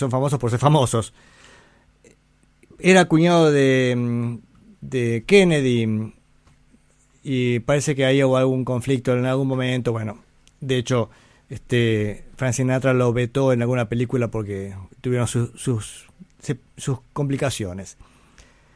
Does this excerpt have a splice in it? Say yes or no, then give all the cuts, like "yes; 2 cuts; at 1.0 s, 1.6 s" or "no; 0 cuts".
no; 0 cuts